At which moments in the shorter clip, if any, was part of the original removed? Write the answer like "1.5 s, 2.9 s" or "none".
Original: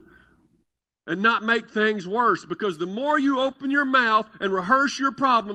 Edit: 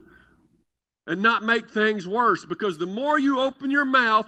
none